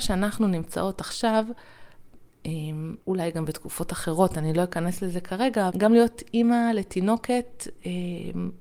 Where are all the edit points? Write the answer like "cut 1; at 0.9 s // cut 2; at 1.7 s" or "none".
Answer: cut 1; at 3.0 s // cut 2; at 5.7 s